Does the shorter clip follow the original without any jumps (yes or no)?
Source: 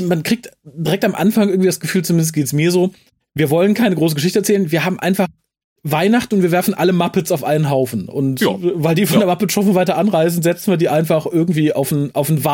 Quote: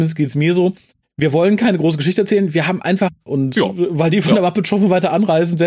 no